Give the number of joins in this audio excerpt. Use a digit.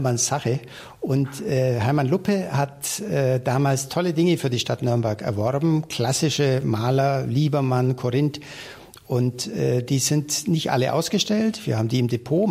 0